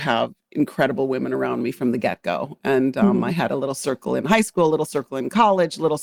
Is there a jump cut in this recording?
no; 0 cuts

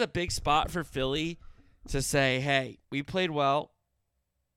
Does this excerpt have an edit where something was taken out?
yes; 1 cut; at 2.8 s

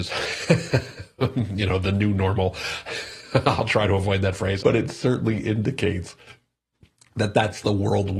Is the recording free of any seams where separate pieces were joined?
no; 1 cut; at 4.6 s

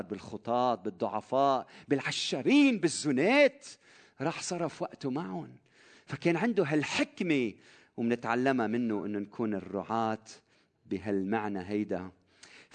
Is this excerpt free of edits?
yes; 0 cuts

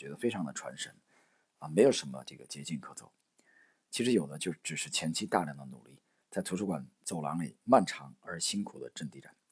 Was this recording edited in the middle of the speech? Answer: no; 0 cuts

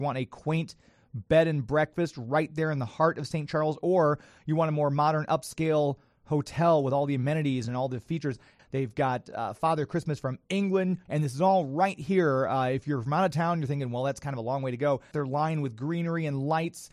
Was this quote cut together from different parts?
yes; 3 cuts; at 8.6 s, 11.1 s, 15.1 s

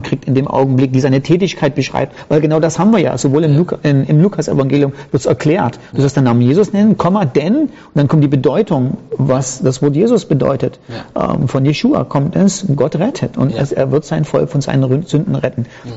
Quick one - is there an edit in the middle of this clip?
no; 0 cuts

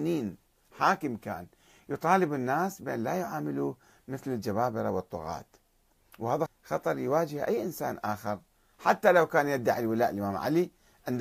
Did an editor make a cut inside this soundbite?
yes; 1 cut; at 6.5 s

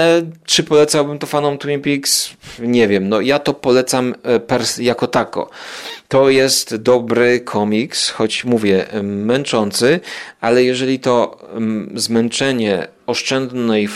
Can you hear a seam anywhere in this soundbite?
no; 0 cuts

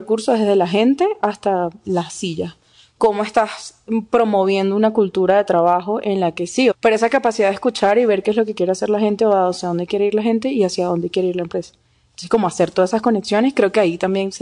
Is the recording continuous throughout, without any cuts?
no; 1 cut; at 6.7 s

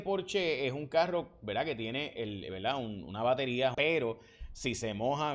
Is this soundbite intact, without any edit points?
no; 1 cut; at 3.7 s

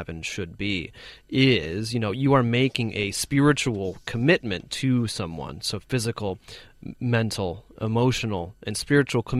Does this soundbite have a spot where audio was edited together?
no; 0 cuts

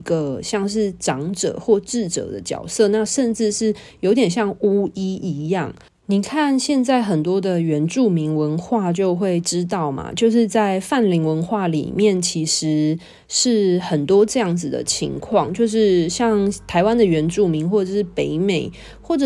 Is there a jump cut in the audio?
yes; 1 cut; at 5.9 s

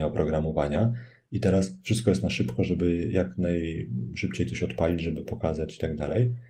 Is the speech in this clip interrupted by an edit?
no; 0 cuts

